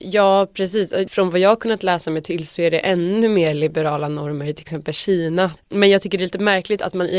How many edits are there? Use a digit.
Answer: 1